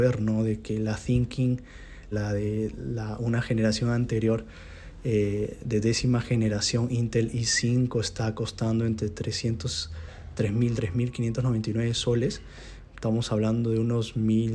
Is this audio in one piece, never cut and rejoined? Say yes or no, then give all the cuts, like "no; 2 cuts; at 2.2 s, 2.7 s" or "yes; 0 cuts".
no; 2 cuts; at 2.1 s, 10.8 s